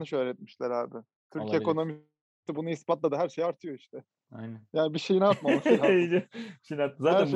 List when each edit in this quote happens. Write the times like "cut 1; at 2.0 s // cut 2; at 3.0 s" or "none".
none